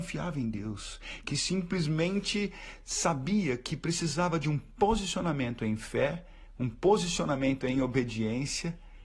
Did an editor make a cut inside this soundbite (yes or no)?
yes